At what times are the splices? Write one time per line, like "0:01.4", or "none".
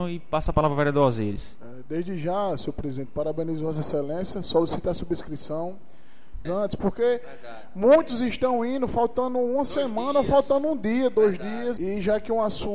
0:06.4
0:11.8